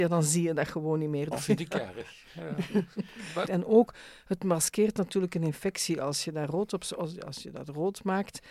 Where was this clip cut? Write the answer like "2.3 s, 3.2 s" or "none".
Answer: 1.3 s, 3.4 s